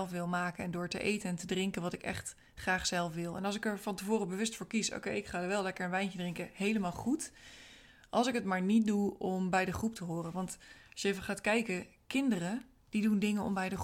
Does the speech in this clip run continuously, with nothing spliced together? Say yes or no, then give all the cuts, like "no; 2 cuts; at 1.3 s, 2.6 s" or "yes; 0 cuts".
yes; 0 cuts